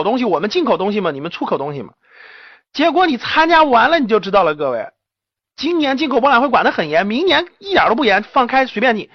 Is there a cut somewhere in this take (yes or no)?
no